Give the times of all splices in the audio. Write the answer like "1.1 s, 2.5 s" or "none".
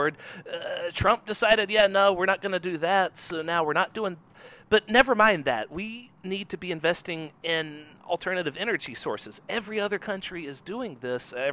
none